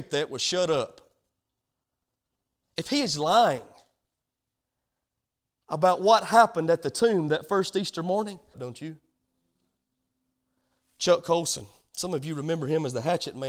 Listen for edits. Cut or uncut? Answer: cut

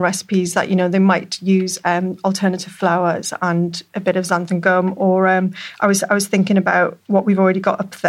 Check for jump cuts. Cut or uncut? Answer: cut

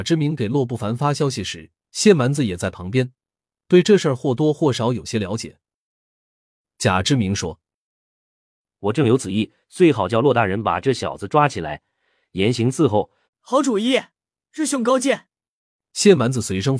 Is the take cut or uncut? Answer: cut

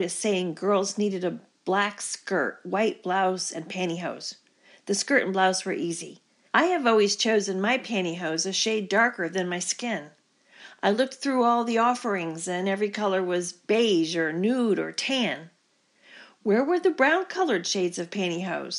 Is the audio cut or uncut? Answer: cut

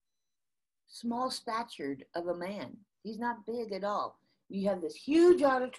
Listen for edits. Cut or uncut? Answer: cut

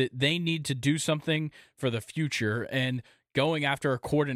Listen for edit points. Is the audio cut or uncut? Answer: uncut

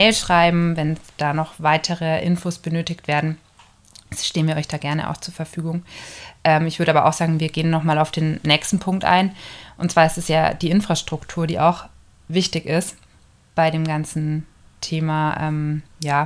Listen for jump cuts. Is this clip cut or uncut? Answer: uncut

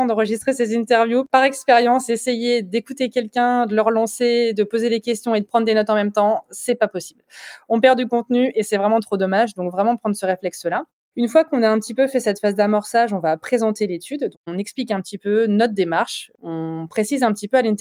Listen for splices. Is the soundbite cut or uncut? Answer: cut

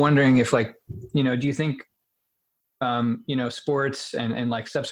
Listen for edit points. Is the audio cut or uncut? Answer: uncut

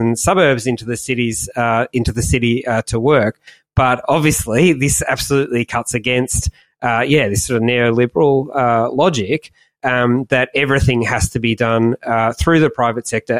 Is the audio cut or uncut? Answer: uncut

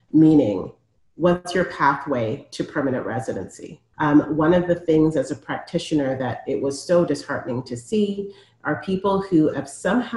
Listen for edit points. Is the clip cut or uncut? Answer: cut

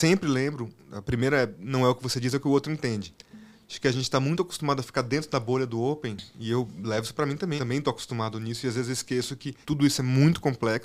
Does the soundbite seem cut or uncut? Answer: cut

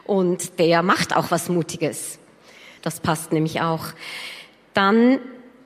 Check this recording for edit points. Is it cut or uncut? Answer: cut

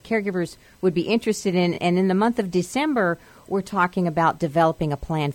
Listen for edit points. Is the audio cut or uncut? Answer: uncut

